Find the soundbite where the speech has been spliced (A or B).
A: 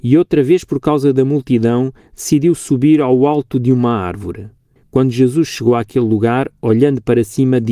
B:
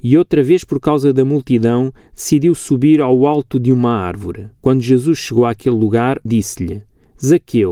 B